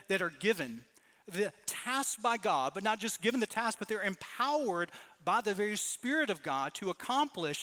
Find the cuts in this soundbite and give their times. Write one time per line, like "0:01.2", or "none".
none